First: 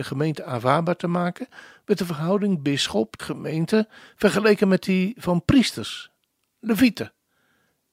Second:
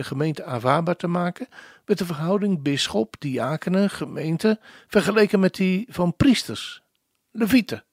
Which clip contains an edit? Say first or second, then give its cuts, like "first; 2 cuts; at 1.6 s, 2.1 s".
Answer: first; 1 cut; at 3.2 s